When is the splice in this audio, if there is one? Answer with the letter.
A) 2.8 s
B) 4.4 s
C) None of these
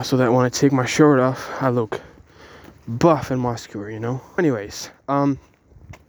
B